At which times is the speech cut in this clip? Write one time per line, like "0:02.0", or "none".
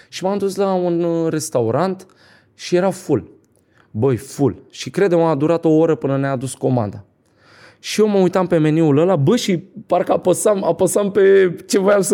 none